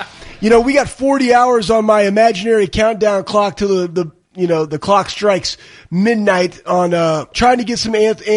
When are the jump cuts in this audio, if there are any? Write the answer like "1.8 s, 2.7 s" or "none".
4.7 s, 7.3 s